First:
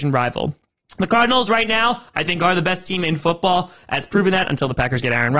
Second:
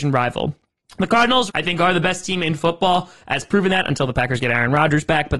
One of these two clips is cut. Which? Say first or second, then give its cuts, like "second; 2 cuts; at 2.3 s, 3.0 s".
second; 1 cut; at 1.5 s